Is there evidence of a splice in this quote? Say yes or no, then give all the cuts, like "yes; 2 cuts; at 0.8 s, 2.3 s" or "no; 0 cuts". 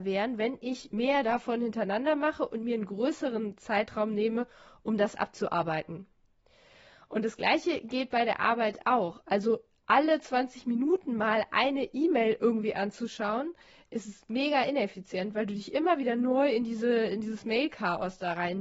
no; 0 cuts